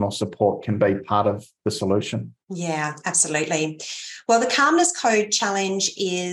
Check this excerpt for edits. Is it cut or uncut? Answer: cut